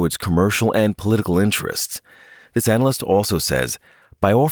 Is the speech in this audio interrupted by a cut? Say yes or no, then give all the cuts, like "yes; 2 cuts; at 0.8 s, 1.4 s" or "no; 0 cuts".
no; 0 cuts